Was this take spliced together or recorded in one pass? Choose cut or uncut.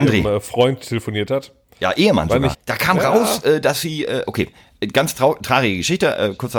cut